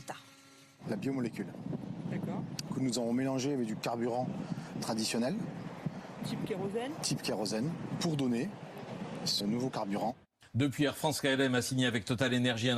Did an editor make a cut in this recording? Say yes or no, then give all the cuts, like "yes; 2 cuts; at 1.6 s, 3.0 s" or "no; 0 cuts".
yes; 1 cut; at 9.4 s